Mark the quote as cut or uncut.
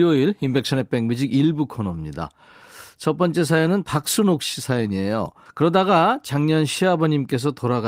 cut